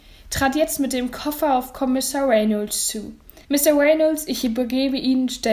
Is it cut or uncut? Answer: cut